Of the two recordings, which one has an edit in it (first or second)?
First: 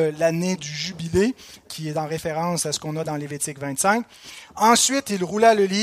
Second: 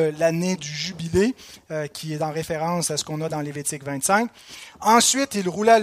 first